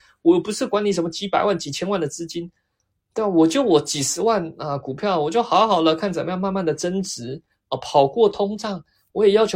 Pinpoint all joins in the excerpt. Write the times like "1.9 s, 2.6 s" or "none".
none